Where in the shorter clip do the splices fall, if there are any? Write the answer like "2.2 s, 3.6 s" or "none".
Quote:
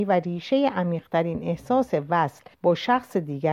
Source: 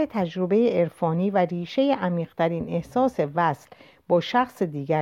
2.5 s